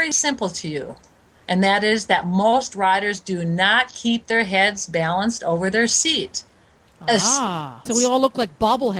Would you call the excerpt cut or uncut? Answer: cut